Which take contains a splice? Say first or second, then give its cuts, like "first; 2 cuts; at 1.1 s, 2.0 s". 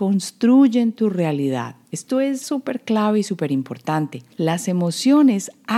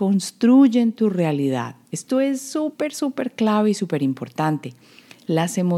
first; 2 cuts; at 2.4 s, 4.3 s